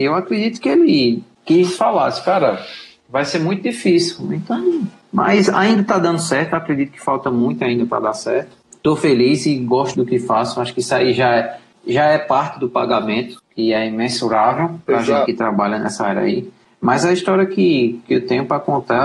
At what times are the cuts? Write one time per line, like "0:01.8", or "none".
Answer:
0:09.9